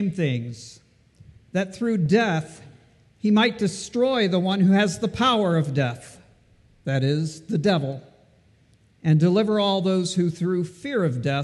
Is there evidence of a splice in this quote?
no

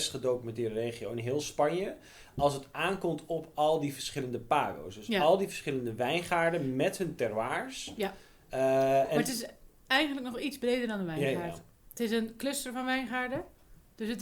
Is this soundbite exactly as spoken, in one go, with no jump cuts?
yes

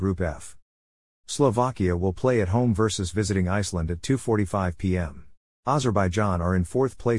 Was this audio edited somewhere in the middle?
yes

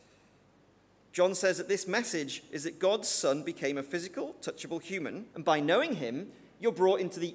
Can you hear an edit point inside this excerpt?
yes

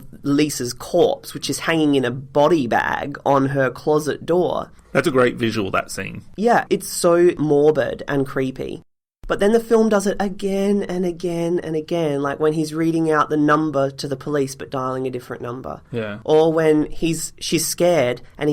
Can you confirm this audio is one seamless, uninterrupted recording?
yes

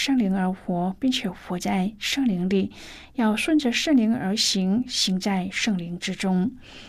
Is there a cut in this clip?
no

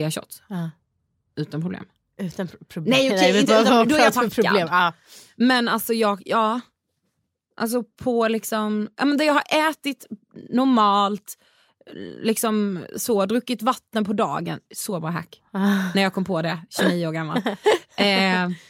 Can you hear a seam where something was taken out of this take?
no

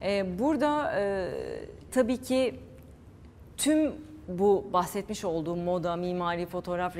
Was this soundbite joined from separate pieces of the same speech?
yes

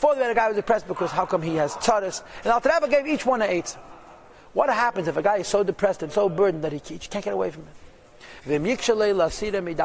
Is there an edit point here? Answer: no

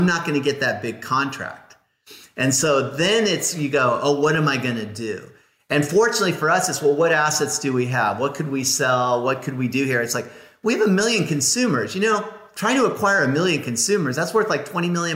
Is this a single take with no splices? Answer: yes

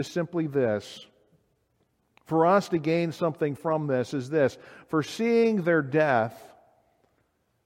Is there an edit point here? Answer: no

